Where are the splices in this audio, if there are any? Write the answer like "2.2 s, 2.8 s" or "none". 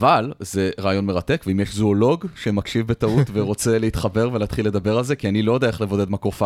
none